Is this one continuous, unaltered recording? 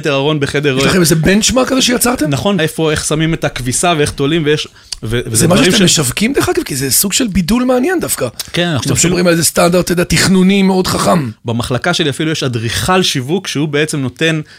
no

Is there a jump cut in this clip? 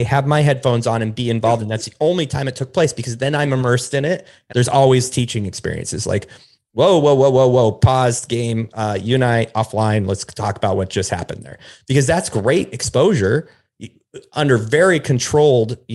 yes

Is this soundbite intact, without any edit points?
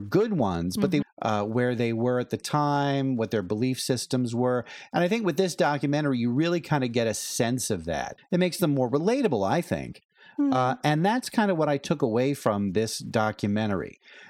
no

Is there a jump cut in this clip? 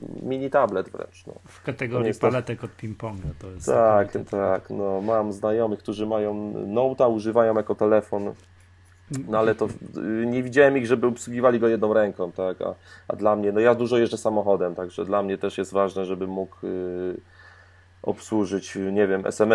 no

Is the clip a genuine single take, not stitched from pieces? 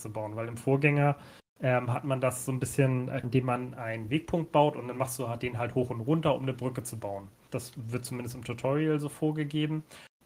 no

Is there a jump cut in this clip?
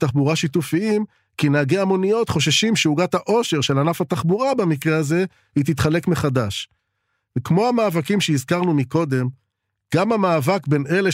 no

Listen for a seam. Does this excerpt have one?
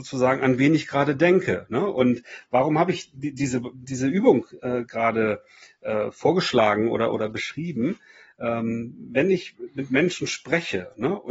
no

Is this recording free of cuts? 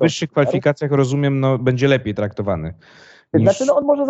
yes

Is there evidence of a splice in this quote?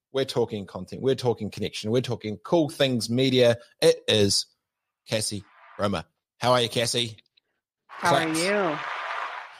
no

